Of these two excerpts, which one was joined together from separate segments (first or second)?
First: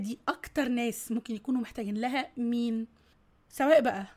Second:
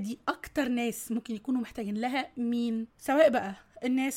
second